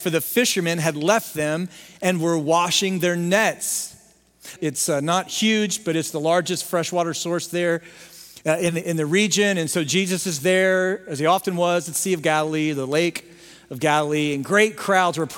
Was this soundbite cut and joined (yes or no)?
yes